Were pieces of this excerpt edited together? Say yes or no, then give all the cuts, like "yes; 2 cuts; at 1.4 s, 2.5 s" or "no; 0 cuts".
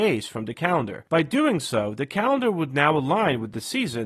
yes; 1 cut; at 1.1 s